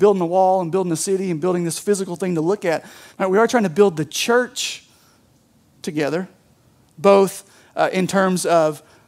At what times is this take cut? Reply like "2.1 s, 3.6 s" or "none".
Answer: 3.1 s